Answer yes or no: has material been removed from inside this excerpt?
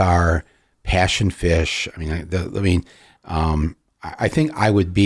no